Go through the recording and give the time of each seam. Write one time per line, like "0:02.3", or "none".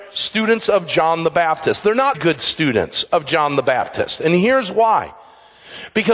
0:02.1